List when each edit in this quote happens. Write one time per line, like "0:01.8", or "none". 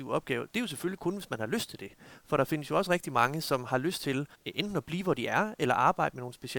0:04.3